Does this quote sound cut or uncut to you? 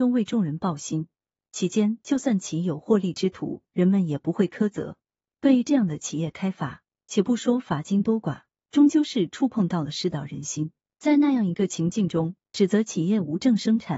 uncut